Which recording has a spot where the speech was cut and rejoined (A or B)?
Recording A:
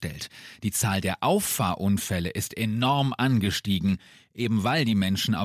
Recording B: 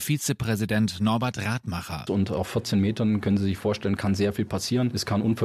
B